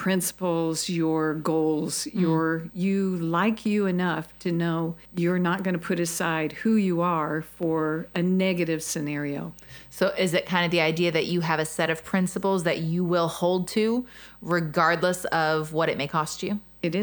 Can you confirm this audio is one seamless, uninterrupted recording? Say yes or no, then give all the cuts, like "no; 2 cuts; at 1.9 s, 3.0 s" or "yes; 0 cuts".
no; 2 cuts; at 2.7 s, 5.1 s